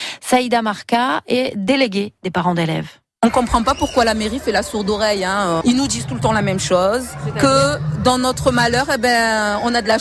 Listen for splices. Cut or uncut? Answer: cut